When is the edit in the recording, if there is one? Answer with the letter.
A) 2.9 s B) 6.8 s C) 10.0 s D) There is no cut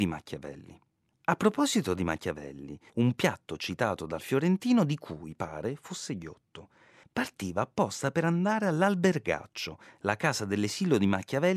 A